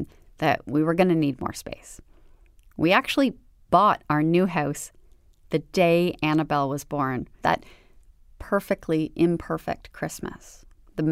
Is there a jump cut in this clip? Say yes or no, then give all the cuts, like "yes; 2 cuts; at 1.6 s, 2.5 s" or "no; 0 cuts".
yes; 1 cut; at 7.4 s